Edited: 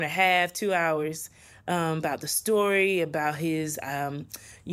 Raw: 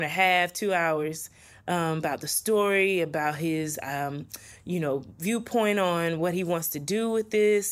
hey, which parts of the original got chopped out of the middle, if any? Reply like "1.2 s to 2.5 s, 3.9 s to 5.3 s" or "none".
none